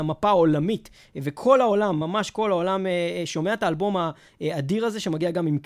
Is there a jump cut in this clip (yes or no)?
no